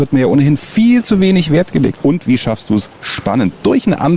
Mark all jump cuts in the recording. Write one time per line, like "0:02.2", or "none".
0:02.0